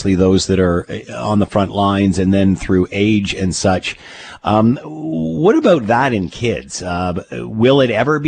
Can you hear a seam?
yes; 1 cut; at 4.4 s

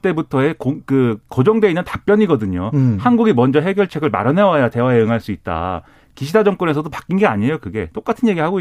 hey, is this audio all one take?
yes; 0 cuts

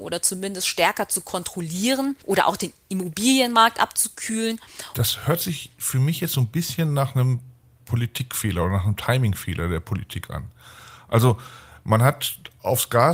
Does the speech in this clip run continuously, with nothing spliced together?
no; 1 cut; at 4.9 s

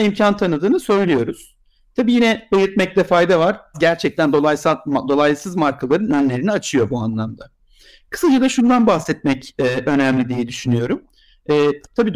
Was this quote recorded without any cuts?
no; 1 cut; at 3.7 s

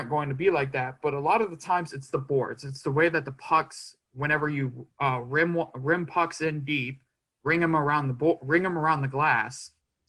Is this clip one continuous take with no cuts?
yes; 0 cuts

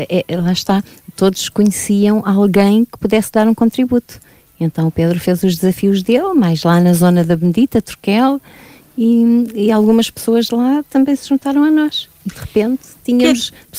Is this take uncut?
yes; 0 cuts

